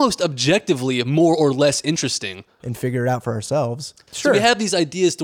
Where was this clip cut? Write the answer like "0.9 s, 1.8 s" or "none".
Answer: 2.6 s, 4.1 s